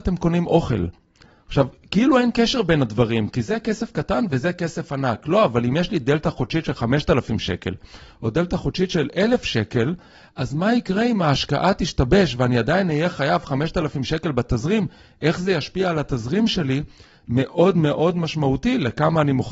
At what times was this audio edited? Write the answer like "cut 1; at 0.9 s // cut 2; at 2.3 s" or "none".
none